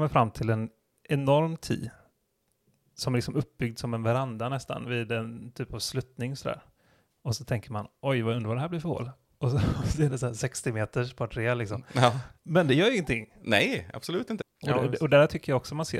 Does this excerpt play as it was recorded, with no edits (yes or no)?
no